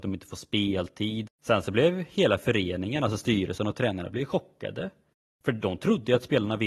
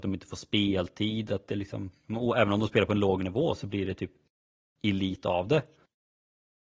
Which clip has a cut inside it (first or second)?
first